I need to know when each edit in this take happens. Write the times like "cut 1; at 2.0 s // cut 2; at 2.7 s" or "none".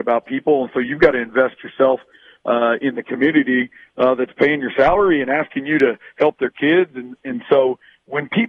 none